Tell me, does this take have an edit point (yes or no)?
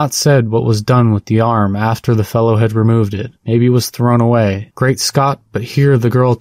yes